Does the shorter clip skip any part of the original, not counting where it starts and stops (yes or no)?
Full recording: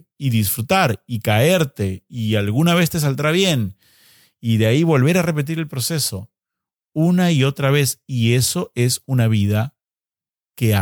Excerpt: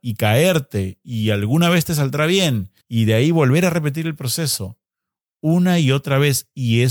yes